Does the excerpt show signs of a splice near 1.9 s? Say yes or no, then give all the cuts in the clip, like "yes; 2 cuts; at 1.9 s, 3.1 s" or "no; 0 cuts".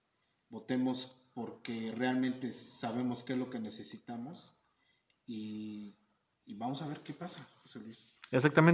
no; 0 cuts